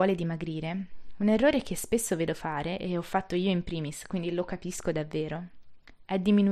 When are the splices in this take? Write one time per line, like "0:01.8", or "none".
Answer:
none

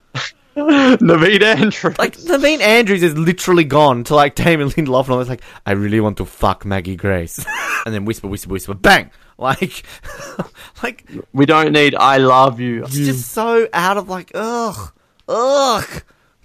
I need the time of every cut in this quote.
0:07.8
0:12.8

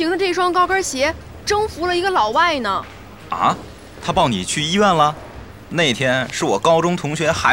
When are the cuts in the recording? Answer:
0:05.6

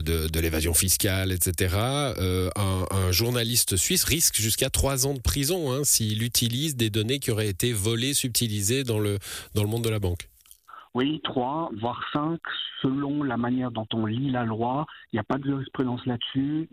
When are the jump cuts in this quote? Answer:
none

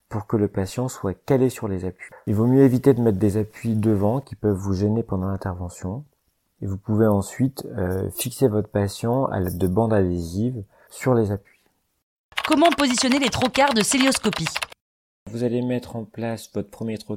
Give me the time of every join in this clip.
none

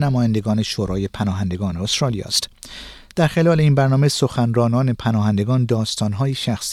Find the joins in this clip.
none

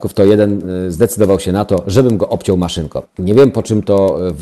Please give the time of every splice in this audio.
0:03.1

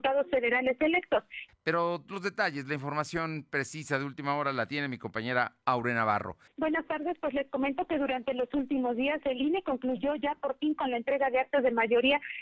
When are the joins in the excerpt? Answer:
0:01.5
0:06.5

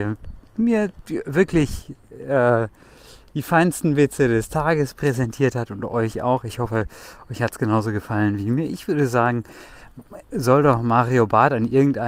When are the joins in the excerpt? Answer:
none

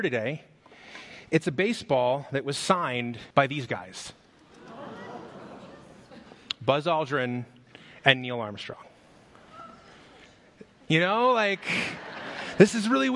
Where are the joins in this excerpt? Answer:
0:03.3
0:10.9

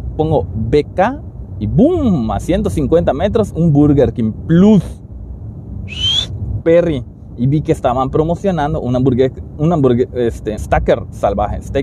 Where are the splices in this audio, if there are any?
0:06.6
0:10.6

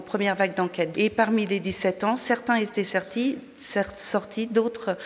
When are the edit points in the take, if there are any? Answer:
0:00.9

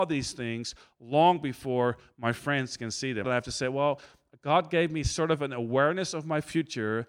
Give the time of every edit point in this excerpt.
0:03.2

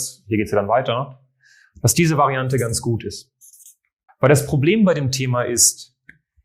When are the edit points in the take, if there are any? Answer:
0:04.1

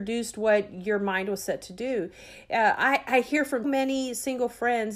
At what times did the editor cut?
0:03.6

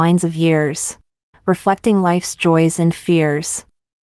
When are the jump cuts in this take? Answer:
0:01.3

